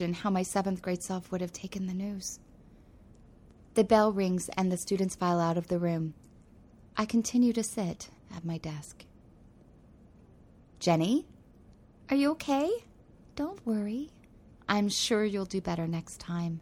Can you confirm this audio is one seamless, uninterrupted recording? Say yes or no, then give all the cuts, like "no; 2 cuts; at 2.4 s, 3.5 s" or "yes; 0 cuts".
no; 2 cuts; at 8.2 s, 13.2 s